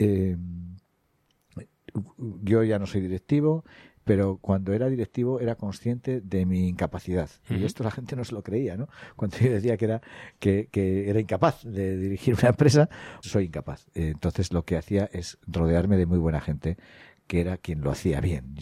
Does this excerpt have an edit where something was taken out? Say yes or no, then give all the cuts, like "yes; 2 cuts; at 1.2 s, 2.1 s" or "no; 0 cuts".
yes; 1 cut; at 13.2 s